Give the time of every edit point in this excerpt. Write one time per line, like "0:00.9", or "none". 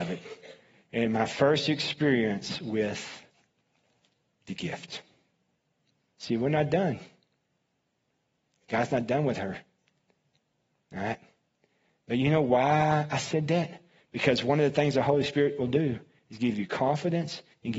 0:06.1